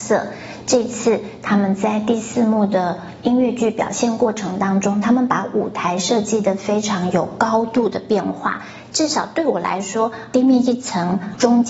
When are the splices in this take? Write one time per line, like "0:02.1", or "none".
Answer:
none

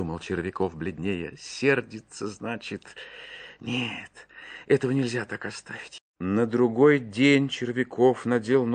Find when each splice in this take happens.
0:06.0

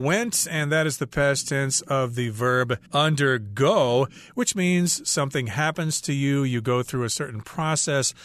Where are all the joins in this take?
0:02.9

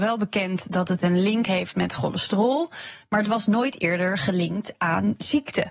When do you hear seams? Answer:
none

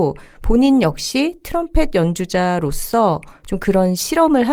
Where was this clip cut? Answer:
none

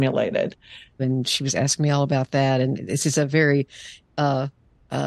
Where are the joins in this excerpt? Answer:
0:01.0

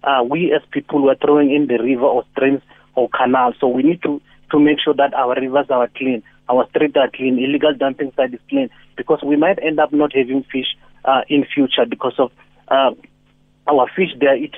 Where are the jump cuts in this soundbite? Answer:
none

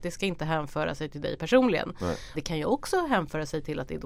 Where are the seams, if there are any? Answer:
0:02.3

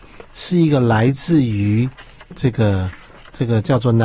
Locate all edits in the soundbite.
none

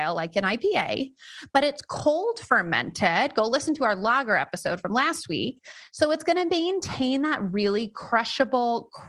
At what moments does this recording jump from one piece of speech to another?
none

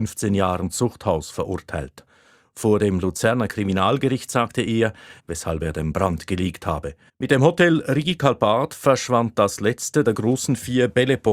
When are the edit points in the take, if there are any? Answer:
0:05.2
0:07.1

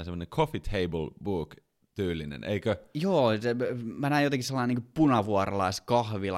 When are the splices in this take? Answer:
none

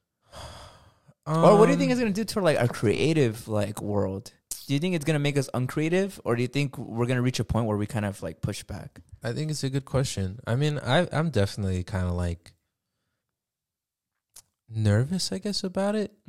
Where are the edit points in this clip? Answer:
0:09.2

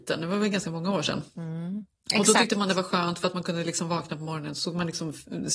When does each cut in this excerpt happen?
0:01.9

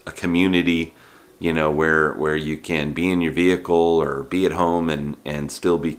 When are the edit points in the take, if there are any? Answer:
none

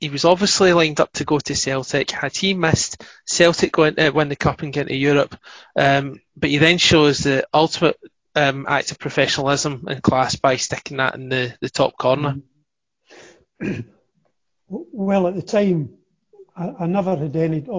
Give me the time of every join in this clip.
none

